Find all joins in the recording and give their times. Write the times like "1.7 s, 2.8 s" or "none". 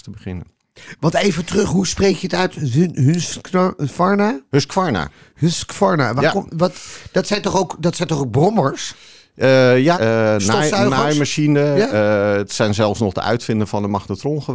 9.9 s